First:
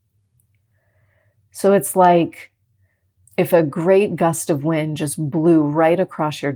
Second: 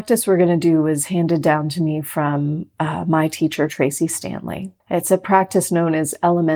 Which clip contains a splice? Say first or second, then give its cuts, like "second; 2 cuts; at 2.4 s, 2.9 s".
second; 1 cut; at 4.8 s